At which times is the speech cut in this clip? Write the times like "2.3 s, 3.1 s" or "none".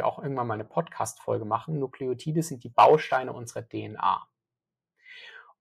none